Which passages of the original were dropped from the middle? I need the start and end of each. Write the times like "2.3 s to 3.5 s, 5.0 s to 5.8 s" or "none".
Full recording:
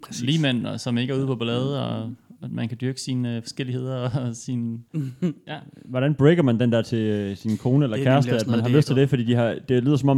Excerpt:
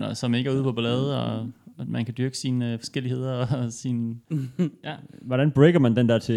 none